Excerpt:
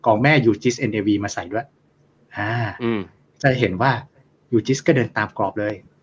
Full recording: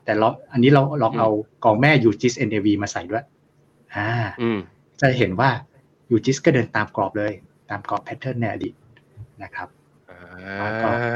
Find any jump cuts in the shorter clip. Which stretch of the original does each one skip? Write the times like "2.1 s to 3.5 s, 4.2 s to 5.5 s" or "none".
none